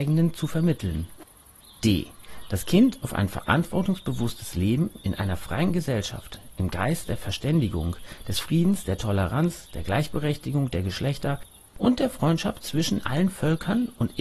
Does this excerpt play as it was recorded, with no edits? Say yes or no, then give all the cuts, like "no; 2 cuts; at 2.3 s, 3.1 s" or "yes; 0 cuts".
yes; 0 cuts